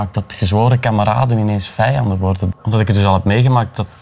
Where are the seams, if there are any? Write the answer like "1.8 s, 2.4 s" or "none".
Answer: 2.5 s